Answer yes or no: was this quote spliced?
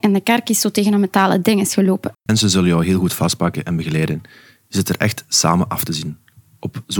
yes